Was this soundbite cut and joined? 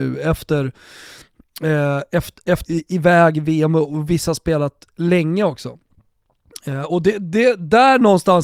yes; 1 cut; at 2.7 s

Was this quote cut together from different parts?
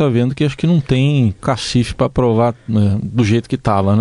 no; 0 cuts

